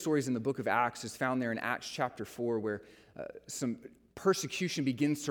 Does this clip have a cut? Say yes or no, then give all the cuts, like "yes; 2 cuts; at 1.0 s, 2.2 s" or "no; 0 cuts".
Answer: no; 0 cuts